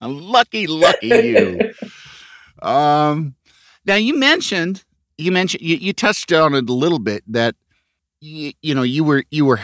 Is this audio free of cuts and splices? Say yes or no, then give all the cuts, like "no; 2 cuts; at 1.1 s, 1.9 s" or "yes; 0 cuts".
yes; 0 cuts